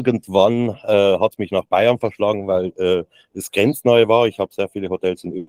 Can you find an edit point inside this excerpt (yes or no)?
no